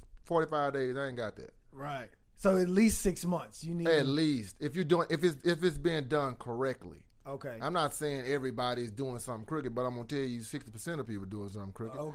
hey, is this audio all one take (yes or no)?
yes